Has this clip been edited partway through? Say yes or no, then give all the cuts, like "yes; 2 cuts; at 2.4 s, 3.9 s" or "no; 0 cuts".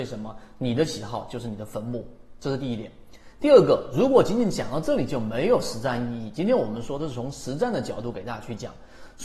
no; 0 cuts